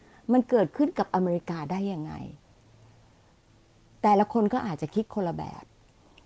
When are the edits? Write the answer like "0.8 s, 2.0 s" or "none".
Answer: none